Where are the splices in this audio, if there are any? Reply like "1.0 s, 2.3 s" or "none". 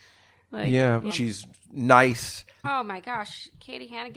1.1 s, 2.6 s